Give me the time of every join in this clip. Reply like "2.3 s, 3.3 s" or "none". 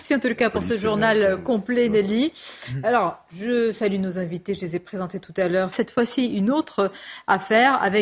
5.7 s